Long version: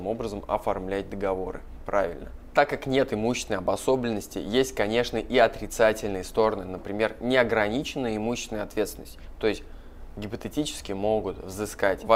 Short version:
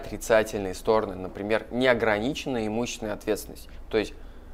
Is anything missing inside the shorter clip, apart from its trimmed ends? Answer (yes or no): no